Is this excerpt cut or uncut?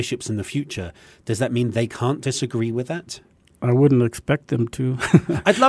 uncut